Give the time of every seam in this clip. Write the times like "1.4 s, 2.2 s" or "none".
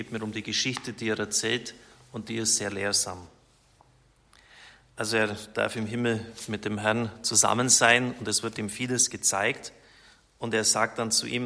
none